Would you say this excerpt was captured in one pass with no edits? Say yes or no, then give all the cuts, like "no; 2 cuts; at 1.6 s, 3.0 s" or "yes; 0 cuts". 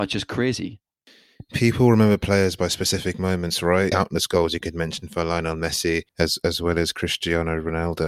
no; 2 cuts; at 3.9 s, 6.1 s